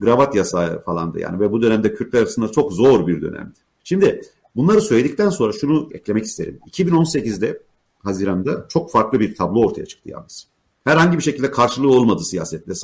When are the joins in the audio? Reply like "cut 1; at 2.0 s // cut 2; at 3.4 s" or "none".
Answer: cut 1; at 10.8 s